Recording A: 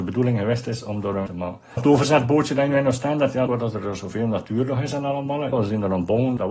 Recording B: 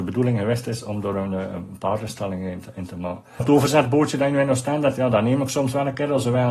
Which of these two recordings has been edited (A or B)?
A